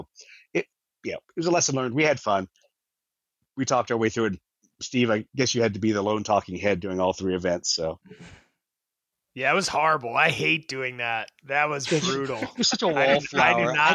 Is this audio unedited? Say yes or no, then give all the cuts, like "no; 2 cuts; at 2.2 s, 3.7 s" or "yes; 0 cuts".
yes; 0 cuts